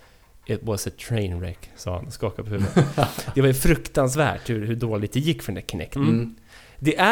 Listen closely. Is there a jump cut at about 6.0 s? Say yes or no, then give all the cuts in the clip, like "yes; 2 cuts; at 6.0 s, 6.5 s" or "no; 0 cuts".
yes; 1 cut; at 6.0 s